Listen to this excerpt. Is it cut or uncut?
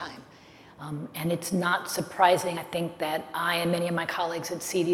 uncut